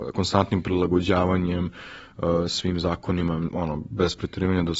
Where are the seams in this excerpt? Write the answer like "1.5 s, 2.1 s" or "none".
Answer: 3.5 s